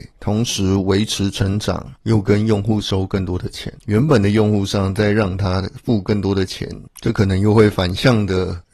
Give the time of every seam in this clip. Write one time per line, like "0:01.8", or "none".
0:03.8